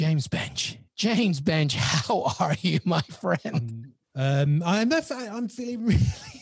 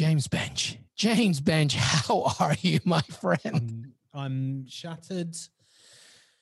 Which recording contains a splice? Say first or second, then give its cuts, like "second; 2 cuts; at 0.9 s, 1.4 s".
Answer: first; 1 cut; at 4.0 s